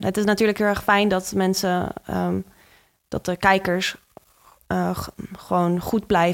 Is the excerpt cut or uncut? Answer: uncut